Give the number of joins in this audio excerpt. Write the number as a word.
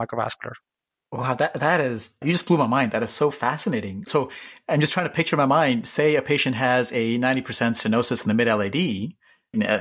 zero